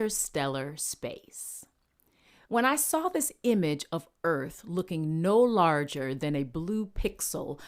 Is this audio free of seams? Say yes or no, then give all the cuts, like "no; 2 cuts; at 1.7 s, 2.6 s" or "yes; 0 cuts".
no; 1 cut; at 2.4 s